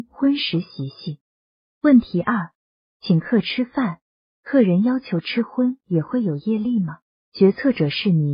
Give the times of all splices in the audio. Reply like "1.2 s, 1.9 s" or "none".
7.2 s